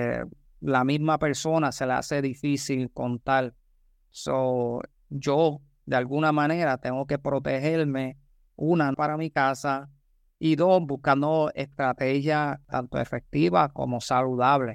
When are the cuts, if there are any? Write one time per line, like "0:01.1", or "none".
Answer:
0:08.9

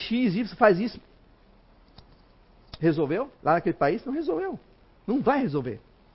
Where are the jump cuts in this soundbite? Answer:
0:03.3

